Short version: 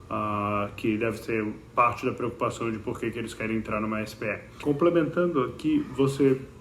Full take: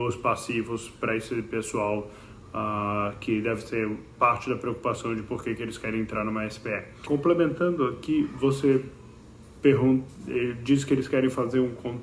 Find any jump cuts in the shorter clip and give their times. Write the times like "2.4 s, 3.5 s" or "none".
none